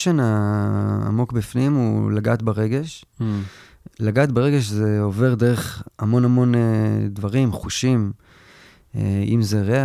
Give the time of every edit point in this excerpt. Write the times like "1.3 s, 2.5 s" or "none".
none